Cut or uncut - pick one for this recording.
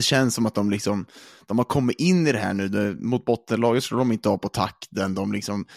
uncut